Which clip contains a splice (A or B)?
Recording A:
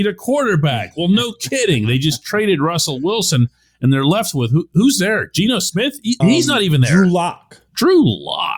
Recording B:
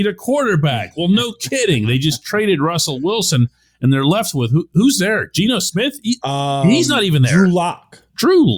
A